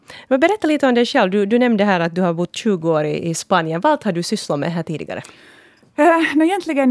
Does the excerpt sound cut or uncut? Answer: uncut